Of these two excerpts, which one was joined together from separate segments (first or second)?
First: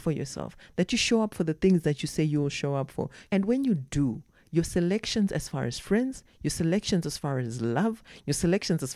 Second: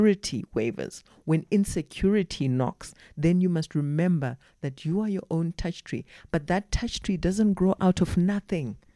first